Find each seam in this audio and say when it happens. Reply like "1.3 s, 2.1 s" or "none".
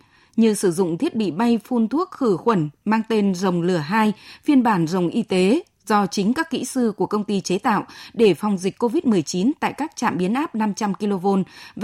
none